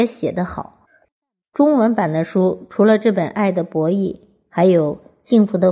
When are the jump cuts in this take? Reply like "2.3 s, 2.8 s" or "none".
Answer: none